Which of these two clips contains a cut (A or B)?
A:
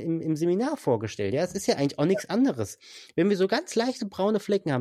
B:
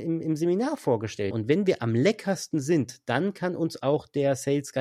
B